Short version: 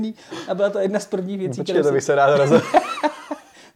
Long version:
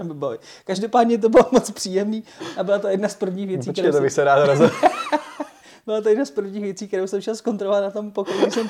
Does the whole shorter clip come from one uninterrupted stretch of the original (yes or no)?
yes